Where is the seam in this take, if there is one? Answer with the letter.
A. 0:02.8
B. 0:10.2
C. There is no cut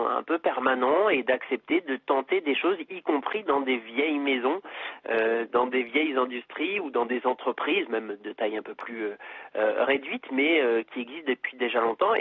C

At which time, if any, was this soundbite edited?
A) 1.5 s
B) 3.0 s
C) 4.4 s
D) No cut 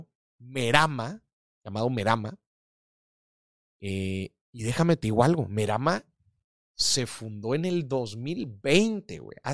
C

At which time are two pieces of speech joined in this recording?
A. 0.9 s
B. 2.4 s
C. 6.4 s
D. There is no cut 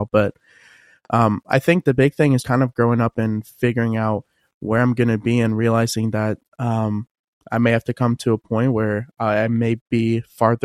B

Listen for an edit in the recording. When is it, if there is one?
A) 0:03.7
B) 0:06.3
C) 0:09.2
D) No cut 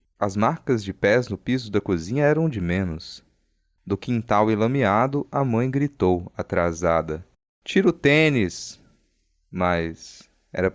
D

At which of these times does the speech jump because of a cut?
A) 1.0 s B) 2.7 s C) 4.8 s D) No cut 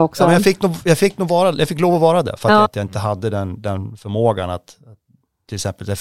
B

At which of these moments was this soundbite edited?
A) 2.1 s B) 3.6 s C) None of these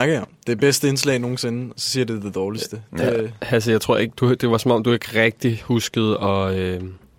C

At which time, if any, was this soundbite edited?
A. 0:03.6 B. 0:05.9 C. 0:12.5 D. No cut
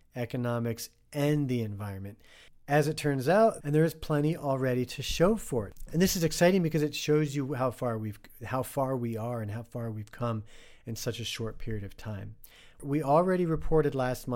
A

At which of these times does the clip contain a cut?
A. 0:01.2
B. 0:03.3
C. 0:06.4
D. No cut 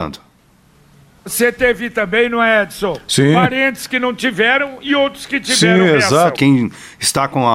C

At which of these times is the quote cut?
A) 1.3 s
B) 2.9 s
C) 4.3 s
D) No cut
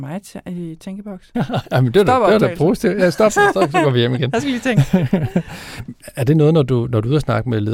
A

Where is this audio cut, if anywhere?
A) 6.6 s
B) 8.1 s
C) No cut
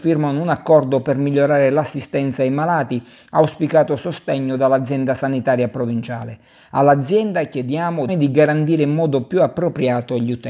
B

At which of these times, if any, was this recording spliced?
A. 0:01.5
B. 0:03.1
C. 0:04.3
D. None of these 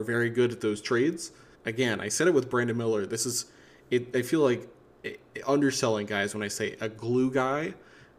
A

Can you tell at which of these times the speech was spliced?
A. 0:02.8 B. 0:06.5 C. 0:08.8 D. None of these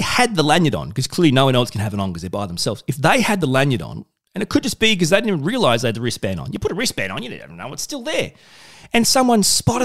D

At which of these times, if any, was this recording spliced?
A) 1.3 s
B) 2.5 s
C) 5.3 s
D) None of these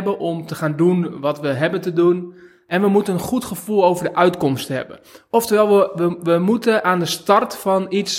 D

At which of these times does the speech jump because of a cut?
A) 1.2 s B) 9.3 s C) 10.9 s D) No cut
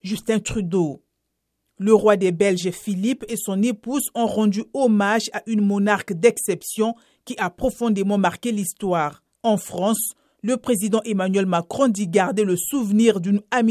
B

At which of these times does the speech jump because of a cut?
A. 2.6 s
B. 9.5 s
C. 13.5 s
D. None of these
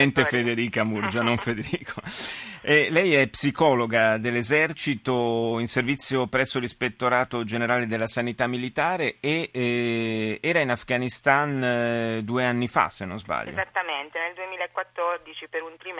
D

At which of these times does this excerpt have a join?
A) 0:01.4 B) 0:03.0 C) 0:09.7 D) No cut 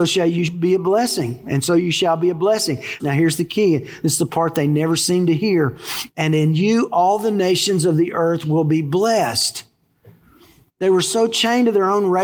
B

